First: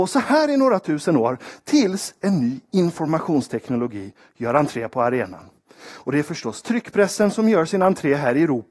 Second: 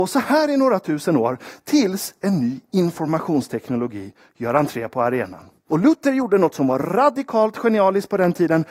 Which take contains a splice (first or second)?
second